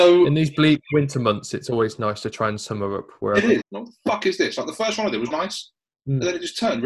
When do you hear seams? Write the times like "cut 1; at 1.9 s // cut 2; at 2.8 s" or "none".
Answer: cut 1; at 3.6 s // cut 2; at 5.3 s